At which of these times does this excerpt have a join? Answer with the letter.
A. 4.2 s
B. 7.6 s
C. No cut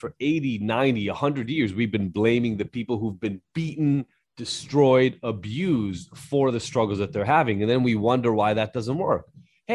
C